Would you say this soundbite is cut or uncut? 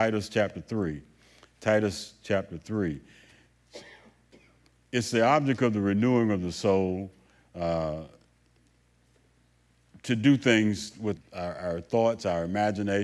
cut